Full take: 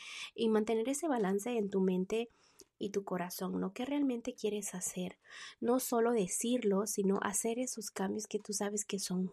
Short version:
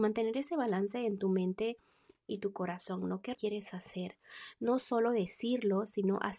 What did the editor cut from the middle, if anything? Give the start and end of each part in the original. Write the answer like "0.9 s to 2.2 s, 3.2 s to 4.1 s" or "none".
3.9 s to 4.3 s